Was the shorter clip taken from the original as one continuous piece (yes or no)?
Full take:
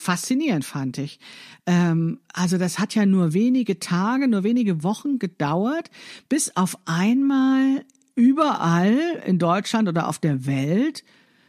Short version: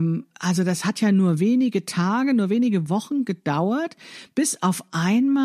yes